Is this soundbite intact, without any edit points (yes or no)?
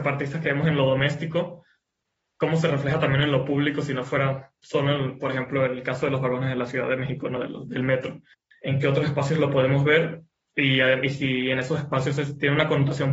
yes